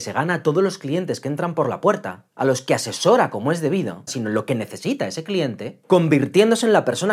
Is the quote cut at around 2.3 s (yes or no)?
no